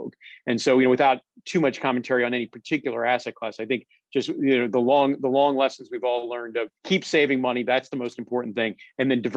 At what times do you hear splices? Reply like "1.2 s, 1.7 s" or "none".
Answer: 6.8 s